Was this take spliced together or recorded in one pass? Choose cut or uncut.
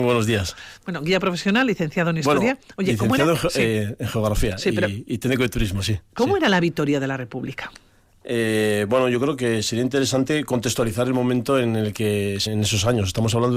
cut